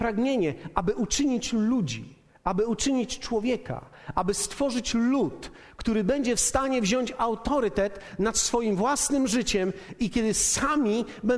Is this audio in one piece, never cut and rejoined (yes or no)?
yes